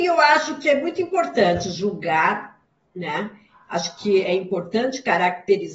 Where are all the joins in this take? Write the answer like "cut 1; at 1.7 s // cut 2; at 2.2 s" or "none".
cut 1; at 4.2 s